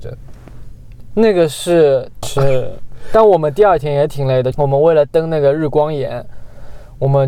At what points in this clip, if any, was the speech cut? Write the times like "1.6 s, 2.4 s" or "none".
2.2 s, 4.5 s